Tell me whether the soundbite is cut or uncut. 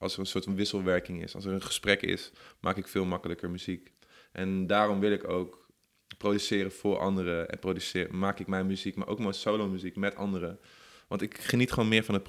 uncut